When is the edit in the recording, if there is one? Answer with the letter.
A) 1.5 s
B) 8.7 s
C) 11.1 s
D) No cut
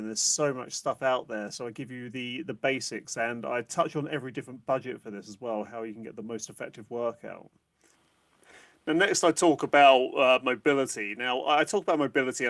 D